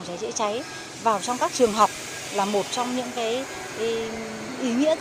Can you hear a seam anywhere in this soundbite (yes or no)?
no